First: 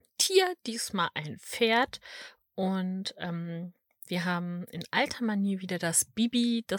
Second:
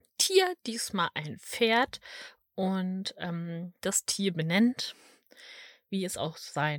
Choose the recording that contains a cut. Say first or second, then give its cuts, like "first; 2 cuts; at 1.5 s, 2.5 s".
second; 1 cut; at 3.8 s